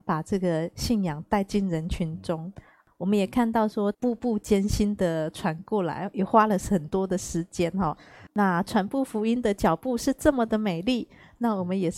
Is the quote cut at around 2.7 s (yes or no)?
no